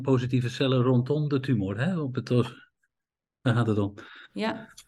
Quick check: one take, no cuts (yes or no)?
yes